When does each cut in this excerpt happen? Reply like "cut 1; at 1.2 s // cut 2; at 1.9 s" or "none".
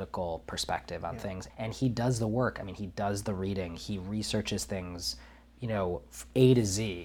cut 1; at 1.5 s